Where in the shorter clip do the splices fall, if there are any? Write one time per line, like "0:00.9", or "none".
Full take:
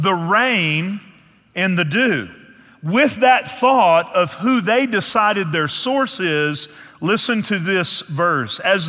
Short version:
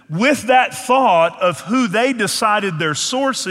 none